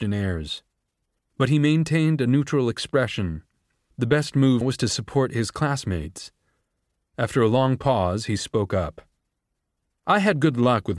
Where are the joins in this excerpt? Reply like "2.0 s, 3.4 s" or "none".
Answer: 1.2 s, 4.6 s